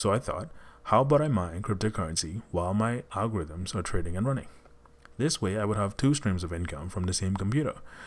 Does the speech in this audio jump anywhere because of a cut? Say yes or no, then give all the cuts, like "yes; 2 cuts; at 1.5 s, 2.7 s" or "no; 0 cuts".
no; 0 cuts